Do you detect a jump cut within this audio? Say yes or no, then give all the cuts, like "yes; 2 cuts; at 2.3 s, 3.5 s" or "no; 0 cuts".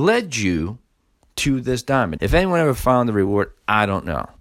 yes; 1 cut; at 2.2 s